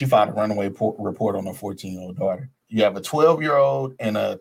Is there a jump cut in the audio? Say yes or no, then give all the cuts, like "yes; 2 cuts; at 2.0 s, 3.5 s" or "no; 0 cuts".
yes; 1 cut; at 2.6 s